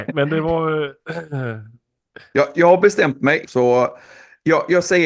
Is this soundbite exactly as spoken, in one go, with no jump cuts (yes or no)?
no